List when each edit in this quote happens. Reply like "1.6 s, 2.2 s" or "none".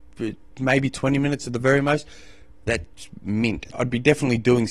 3.7 s